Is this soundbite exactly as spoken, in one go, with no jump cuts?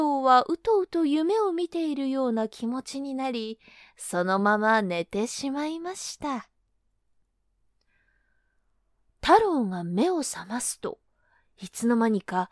yes; 0 cuts

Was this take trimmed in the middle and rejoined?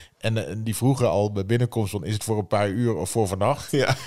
no; 0 cuts

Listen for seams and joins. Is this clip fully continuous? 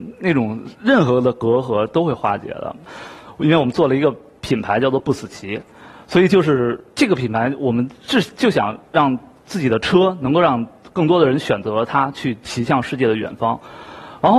yes; 0 cuts

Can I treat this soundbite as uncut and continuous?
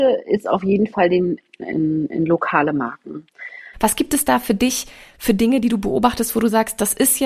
no; 2 cuts; at 1.6 s, 3.7 s

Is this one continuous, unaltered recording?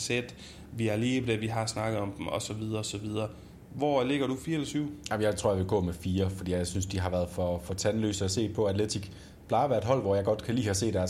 yes; 0 cuts

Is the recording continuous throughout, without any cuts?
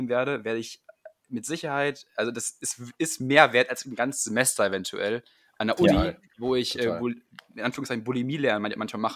yes; 0 cuts

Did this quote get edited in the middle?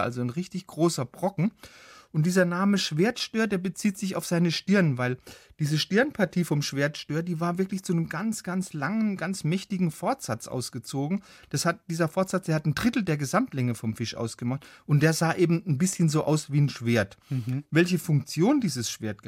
no; 0 cuts

